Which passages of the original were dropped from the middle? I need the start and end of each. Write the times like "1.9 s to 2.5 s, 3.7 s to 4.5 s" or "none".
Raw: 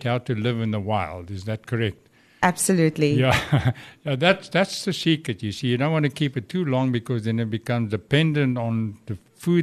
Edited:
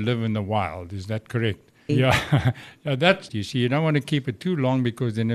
2.3 s to 3.1 s, 4.5 s to 5.4 s